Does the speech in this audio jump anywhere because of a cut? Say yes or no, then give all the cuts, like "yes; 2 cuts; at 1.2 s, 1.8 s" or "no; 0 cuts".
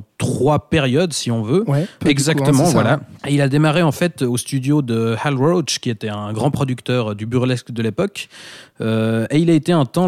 yes; 2 cuts; at 2.0 s, 3.2 s